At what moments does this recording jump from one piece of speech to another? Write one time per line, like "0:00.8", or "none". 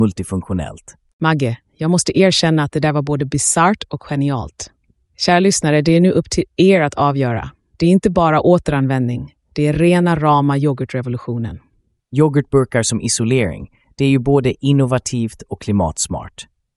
0:07.7
0:12.0